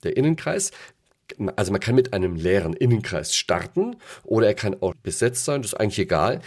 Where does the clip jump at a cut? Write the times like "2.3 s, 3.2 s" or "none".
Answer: 4.9 s